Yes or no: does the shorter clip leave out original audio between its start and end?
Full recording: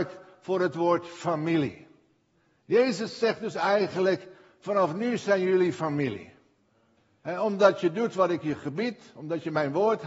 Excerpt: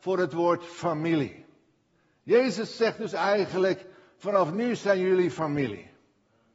no